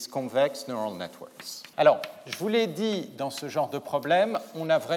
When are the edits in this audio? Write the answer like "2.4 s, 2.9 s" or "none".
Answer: 1.7 s